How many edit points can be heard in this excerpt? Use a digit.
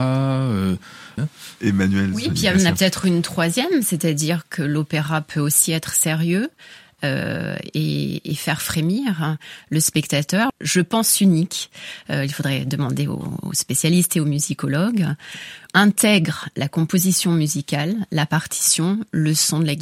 3